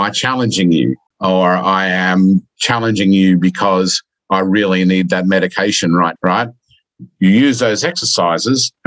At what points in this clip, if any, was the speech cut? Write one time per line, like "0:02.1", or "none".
0:01.1
0:06.2

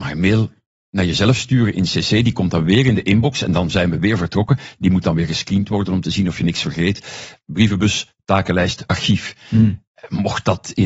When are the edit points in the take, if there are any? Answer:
0:07.4
0:08.9

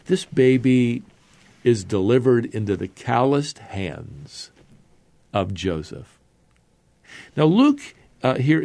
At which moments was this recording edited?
none

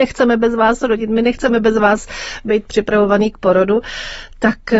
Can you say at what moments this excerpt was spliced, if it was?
none

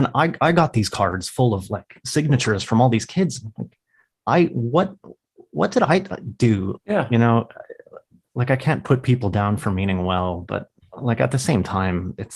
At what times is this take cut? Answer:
0:06.8

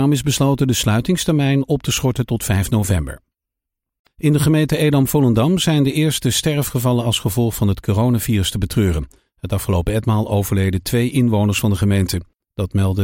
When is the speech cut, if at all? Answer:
none

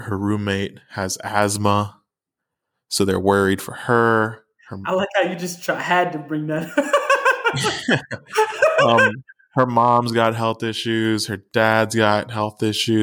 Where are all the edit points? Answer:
none

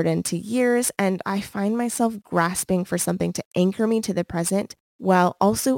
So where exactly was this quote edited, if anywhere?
0:04.8

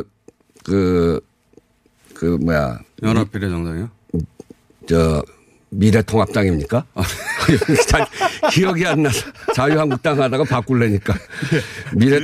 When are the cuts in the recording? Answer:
none

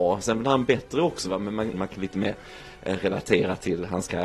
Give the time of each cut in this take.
0:01.7

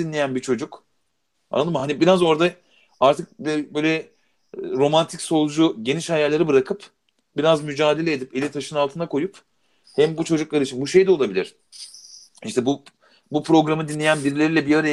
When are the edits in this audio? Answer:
none

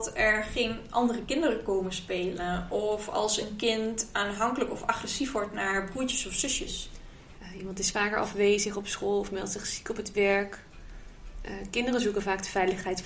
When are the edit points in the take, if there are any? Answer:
0:07.3

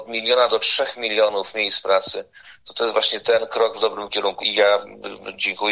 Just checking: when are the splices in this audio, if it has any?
0:04.4

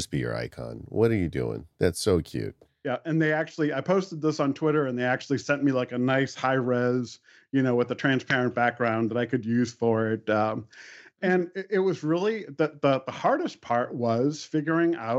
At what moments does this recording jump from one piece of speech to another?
none

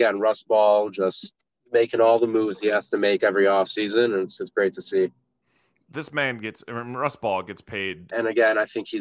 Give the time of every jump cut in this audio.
0:08.1

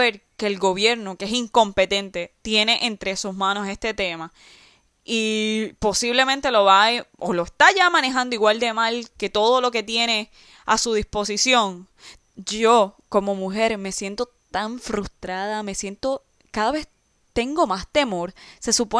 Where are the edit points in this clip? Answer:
0:12.2

